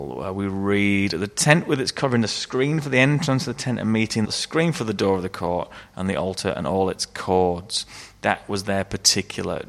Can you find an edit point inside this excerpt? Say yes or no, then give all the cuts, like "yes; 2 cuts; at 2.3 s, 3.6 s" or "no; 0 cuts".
yes; 1 cut; at 4.2 s